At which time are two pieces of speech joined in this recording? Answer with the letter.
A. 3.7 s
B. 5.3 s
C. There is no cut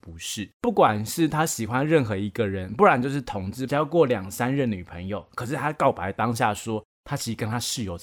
A